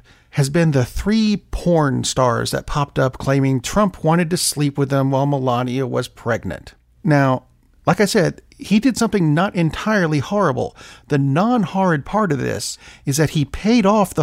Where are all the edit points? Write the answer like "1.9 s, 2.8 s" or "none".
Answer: none